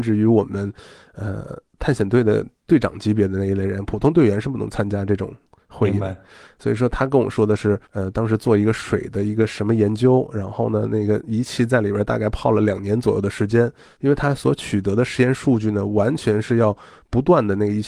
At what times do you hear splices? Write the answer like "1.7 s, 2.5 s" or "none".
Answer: 7.8 s

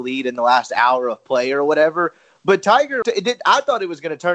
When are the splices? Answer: 3.0 s

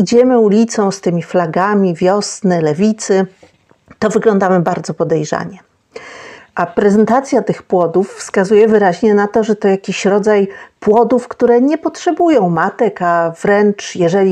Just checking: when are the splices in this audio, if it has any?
6.4 s

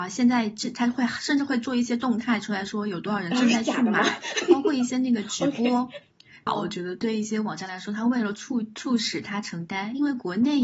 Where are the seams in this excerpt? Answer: 6.5 s

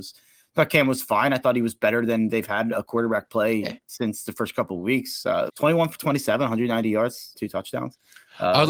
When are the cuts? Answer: 5.5 s, 7.3 s

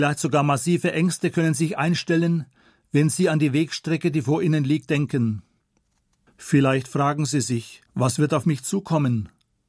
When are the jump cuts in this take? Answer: 6.3 s, 7.9 s

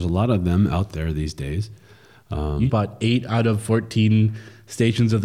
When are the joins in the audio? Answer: 2.7 s

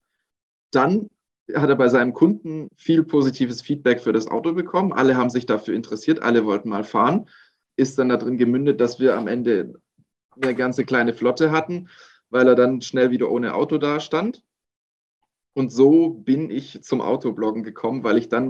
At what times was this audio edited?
7.7 s

